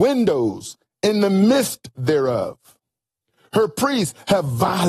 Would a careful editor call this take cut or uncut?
uncut